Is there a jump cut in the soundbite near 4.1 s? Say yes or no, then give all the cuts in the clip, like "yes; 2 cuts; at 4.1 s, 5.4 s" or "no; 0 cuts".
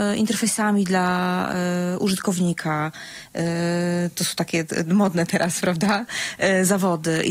no; 0 cuts